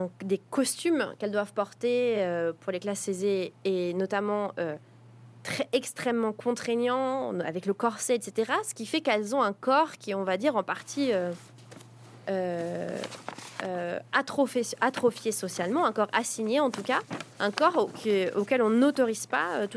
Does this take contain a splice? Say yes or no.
no